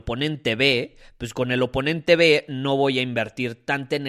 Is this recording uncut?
yes; 0 cuts

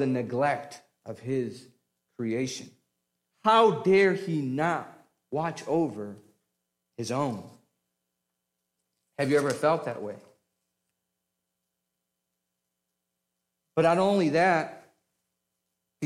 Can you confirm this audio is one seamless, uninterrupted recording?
yes; 0 cuts

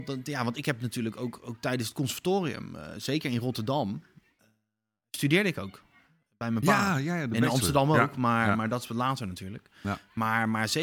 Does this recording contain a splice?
no; 0 cuts

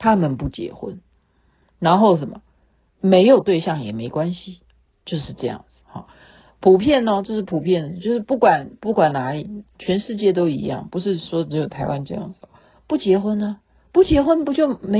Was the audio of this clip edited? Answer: no; 0 cuts

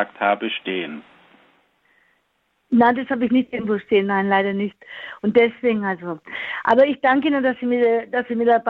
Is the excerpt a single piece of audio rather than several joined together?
yes; 0 cuts

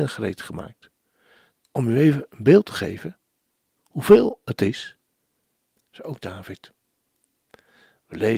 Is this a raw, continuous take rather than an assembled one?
no; 2 cuts; at 1.6 s, 5.8 s

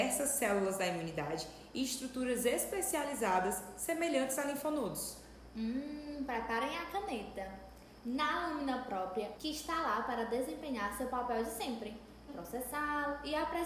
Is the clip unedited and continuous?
no; 2 cuts; at 9.4 s, 12.3 s

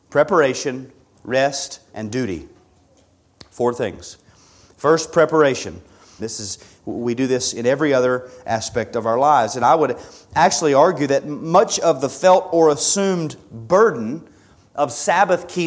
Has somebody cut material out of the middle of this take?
yes; 2 cuts; at 1.9 s, 6.2 s

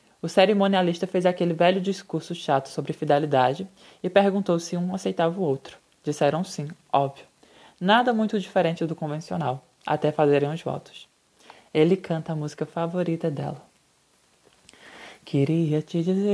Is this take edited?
no; 0 cuts

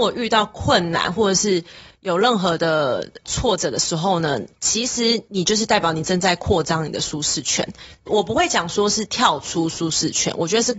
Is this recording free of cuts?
yes; 0 cuts

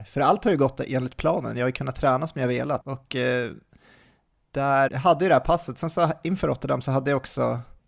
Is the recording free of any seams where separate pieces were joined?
no; 2 cuts; at 2.8 s, 4.9 s

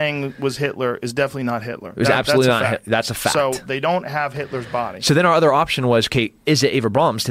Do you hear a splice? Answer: no; 0 cuts

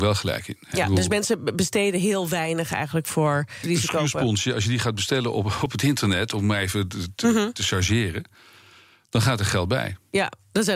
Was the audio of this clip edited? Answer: yes; 1 cut; at 3.6 s

